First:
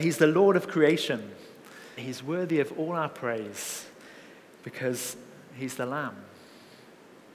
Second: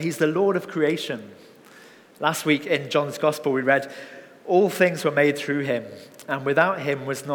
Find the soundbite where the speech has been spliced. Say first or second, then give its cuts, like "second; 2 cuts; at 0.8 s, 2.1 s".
first; 1 cut; at 2.0 s